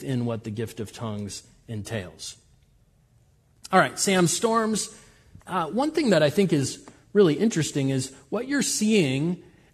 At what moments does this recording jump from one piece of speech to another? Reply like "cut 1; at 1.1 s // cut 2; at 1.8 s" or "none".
cut 1; at 5.4 s

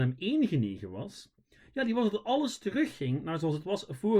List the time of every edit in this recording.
none

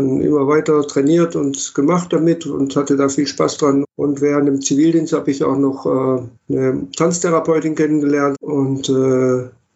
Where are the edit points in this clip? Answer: cut 1; at 3.8 s // cut 2; at 6.4 s // cut 3; at 8.3 s

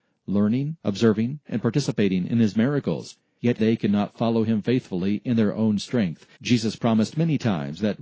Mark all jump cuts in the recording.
cut 1; at 3.6 s // cut 2; at 6.4 s

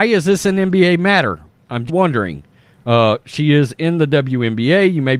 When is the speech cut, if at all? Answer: cut 1; at 1.9 s

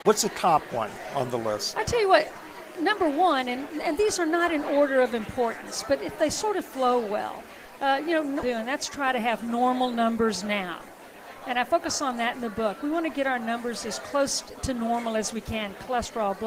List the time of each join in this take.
cut 1; at 8.4 s

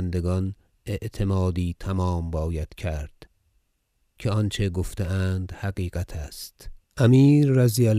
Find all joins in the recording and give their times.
cut 1; at 6.8 s

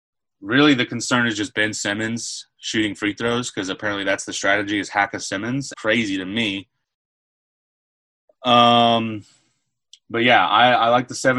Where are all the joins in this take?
cut 1; at 5.7 s

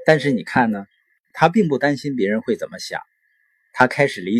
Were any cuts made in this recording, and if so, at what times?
cut 1; at 1.3 s

